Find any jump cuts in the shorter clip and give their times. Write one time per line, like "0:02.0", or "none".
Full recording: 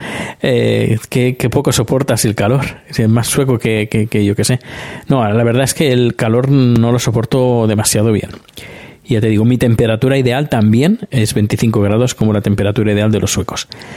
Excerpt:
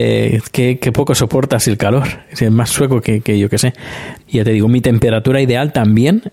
0:03.0
0:04.2